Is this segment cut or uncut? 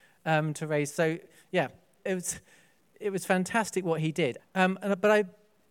cut